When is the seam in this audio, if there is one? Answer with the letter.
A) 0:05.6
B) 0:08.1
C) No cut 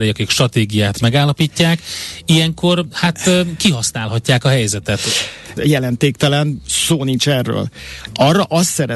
A